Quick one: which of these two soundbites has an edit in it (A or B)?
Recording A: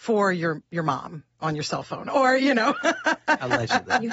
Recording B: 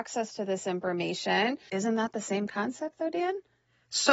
B